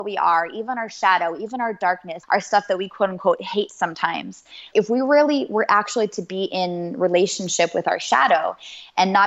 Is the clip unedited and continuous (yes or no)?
no